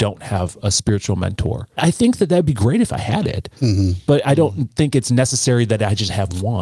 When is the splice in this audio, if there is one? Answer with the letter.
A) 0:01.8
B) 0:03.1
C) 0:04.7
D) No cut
A